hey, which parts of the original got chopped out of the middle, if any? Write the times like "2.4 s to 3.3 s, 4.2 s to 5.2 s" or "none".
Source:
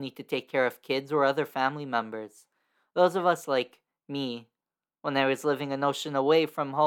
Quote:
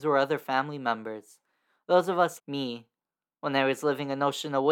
3.5 s to 4.0 s